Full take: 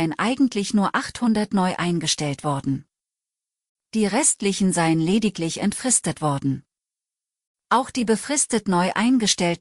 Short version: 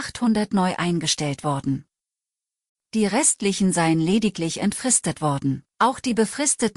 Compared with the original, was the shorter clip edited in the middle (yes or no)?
yes